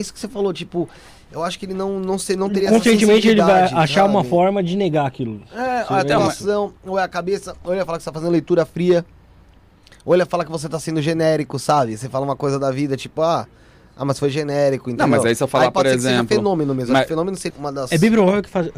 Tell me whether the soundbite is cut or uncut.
cut